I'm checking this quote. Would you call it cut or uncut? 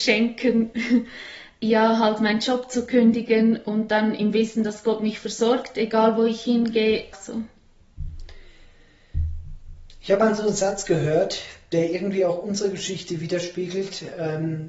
cut